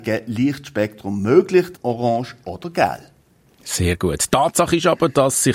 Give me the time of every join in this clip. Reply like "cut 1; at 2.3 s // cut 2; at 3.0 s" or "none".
cut 1; at 1.7 s